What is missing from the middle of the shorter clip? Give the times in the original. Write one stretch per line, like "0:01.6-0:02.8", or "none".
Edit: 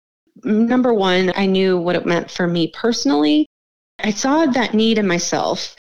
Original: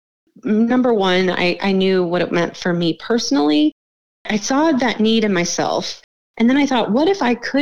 0:01.3-0:01.6

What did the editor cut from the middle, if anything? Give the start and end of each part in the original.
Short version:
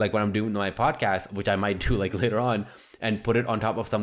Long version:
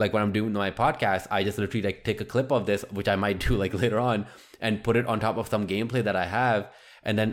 0:01.3-0:02.9

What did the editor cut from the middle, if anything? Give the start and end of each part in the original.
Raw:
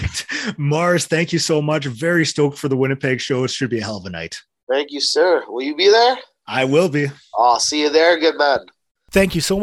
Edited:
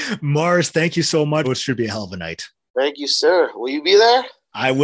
0:01.8-0:03.4

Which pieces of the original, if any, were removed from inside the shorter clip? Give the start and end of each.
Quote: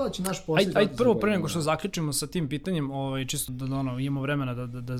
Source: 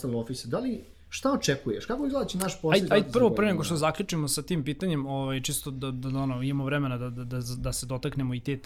0:05.6-0:05.9

